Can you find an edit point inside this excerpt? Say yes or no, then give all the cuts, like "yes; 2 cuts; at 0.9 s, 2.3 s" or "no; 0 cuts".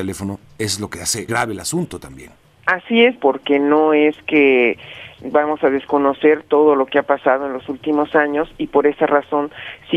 yes; 2 cuts; at 1.3 s, 3.2 s